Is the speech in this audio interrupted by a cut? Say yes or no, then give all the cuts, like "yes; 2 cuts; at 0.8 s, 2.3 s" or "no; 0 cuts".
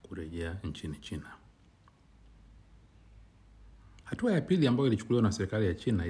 yes; 1 cut; at 4.0 s